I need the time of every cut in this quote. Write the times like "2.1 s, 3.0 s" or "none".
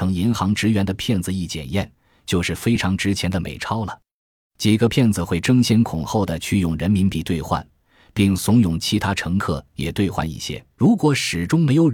10.8 s